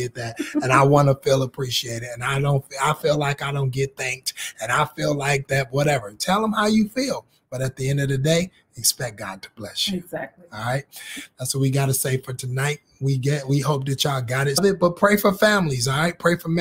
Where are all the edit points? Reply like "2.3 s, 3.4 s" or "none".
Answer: none